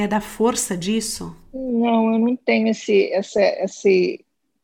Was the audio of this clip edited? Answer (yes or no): no